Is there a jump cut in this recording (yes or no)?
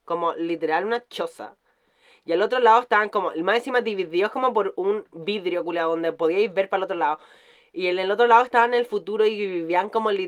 no